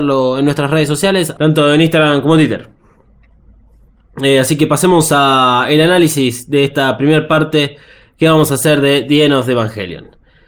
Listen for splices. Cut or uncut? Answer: cut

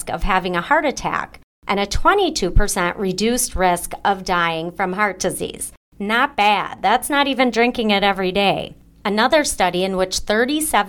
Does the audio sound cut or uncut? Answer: uncut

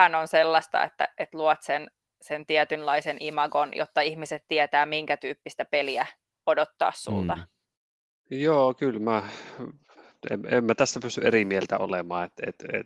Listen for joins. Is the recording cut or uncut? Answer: uncut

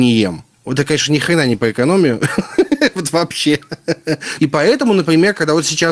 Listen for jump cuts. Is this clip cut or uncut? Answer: cut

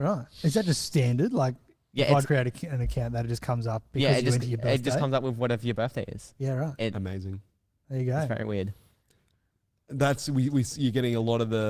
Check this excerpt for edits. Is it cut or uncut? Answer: cut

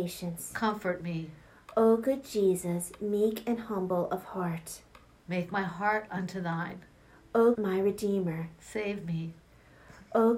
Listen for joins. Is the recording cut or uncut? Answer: cut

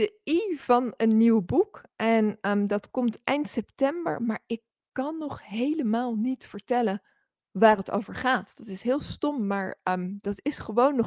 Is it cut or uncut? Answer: uncut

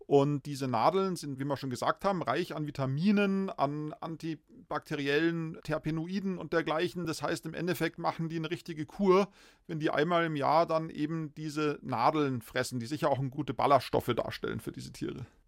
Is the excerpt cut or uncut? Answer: uncut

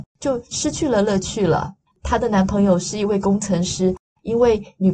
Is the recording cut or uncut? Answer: uncut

